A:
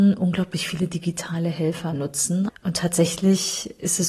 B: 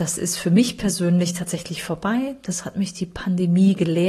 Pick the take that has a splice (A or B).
A